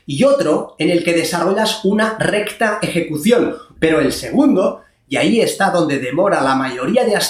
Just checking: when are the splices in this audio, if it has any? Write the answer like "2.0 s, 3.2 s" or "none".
3.8 s